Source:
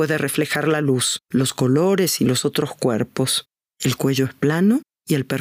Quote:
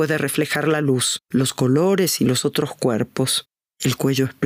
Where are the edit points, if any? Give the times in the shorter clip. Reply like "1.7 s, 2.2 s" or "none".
none